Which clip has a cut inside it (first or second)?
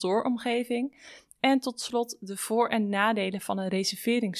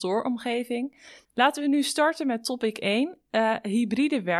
second